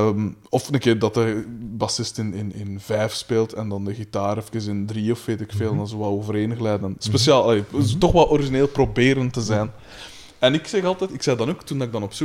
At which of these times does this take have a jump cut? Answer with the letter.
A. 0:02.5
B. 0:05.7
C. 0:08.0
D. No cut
A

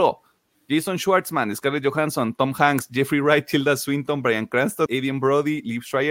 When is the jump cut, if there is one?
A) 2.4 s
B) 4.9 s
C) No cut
B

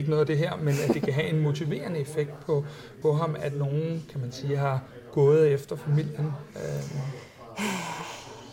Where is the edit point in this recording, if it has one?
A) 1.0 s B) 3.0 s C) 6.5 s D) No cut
B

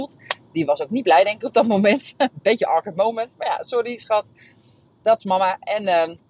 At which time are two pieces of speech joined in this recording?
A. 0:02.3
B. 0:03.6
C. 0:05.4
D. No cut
D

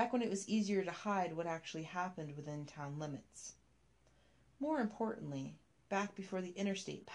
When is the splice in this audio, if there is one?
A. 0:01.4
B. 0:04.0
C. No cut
C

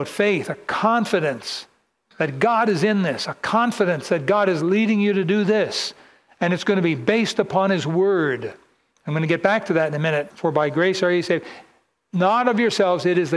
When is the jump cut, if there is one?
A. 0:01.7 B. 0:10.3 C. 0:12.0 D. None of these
B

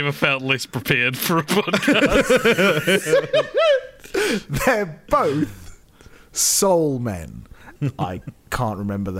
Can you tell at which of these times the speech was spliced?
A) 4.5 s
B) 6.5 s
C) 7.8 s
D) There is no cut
C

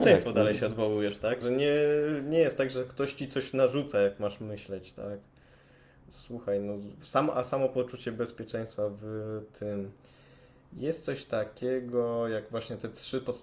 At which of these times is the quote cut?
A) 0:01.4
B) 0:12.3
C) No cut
A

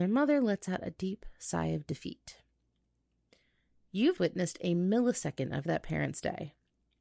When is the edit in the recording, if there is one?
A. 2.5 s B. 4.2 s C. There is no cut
B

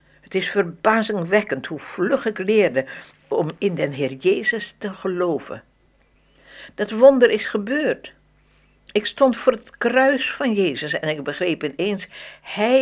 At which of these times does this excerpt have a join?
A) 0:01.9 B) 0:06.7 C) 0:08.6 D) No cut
D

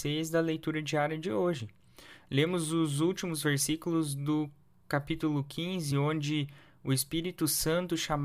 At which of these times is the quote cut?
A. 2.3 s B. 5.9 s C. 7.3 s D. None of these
D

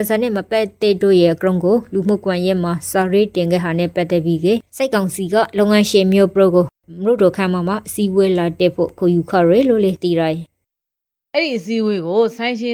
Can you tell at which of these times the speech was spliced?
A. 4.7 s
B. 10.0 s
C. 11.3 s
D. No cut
A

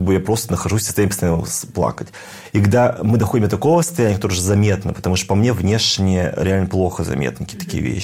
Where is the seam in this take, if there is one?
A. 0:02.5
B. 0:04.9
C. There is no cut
C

